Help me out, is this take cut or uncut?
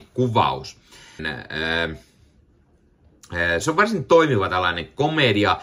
cut